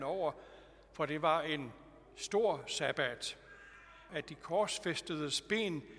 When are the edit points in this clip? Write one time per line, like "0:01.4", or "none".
0:04.1